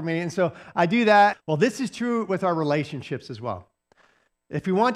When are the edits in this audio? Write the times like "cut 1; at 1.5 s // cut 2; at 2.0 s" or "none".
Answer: cut 1; at 1.3 s